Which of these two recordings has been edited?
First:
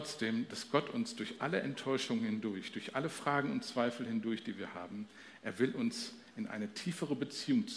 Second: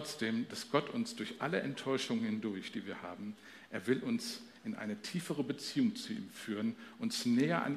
second; 1 cut; at 2.7 s

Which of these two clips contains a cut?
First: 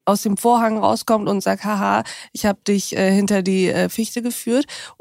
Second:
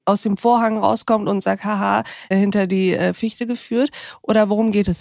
second; 1 cut; at 2.3 s

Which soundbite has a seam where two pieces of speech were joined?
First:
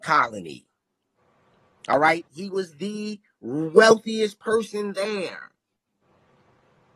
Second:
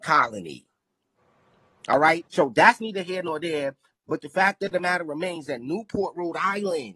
second; 1 cut; at 2.3 s

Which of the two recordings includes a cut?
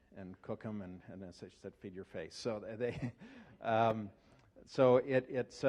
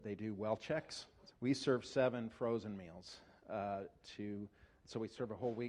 second; 1 cut; at 1.3 s

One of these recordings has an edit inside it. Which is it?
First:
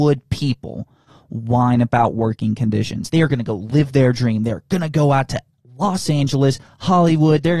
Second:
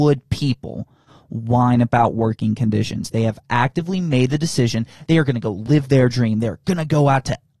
first; 1 cut; at 3.1 s

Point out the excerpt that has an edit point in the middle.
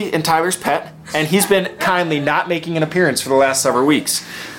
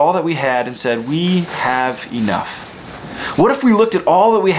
first; 1 cut; at 1.8 s

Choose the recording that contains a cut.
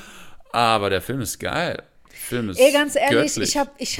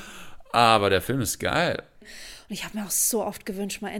second; 1 cut; at 2.0 s

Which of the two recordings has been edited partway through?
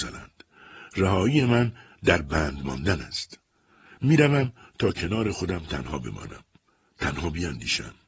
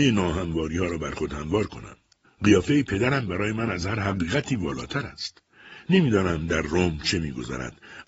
second; 2 cuts; at 2.2 s, 5.8 s

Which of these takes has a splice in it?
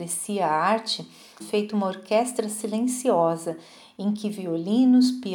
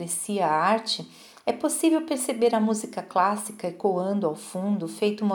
first; 1 cut; at 1.4 s

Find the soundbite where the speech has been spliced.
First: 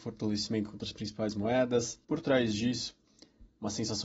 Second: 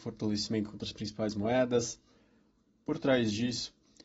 first; 1 cut; at 2.0 s

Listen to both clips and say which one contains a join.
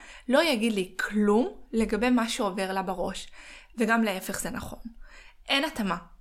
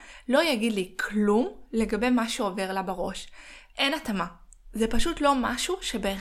second; 1 cut; at 3.7 s

